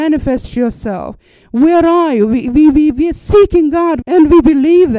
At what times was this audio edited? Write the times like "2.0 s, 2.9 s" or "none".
4.0 s